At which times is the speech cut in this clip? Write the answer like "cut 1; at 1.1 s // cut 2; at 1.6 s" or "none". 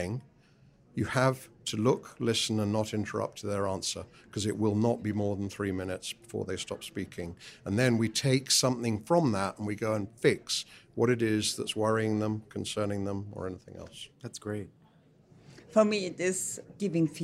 cut 1; at 14.1 s